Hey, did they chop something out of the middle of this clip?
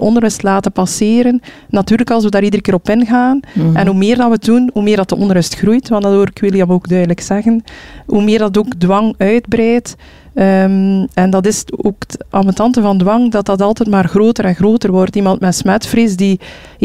no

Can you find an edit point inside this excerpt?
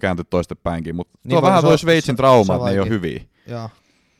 no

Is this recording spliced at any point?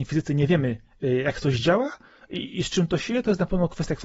no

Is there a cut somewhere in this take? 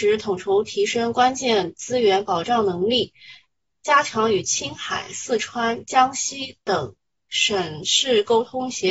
no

